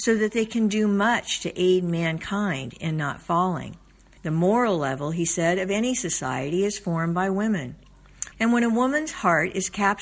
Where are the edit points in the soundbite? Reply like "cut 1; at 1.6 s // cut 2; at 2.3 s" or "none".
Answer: cut 1; at 4.2 s // cut 2; at 8.3 s

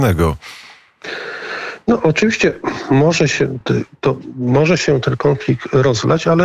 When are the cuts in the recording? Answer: none

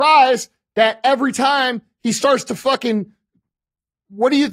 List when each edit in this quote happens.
none

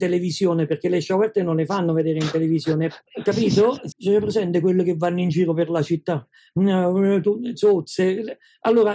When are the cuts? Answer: cut 1; at 3.9 s

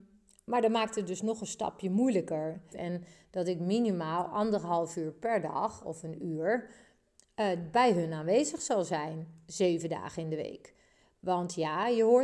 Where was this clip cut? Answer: cut 1; at 2.7 s

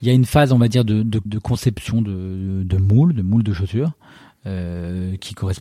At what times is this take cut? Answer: cut 1; at 1.3 s

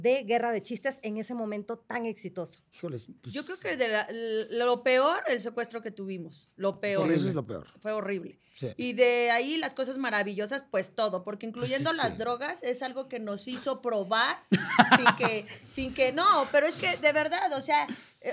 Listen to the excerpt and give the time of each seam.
none

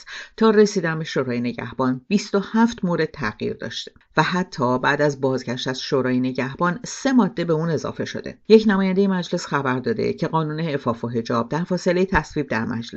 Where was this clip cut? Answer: cut 1; at 8.4 s

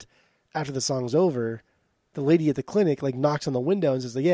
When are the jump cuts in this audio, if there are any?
none

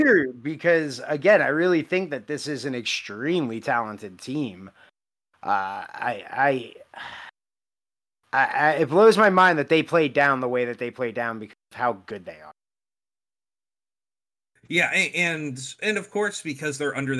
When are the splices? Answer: none

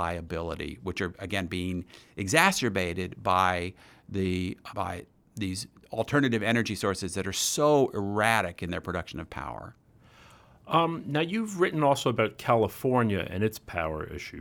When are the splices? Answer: cut 1; at 4.7 s

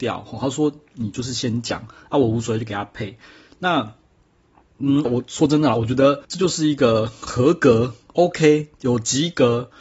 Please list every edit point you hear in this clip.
cut 1; at 5.1 s // cut 2; at 6.2 s

